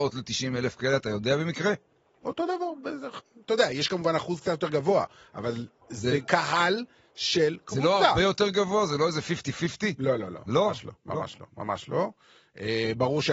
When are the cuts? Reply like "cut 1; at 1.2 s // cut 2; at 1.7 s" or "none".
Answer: none